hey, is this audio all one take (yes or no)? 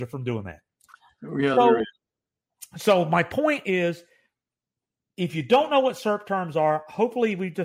yes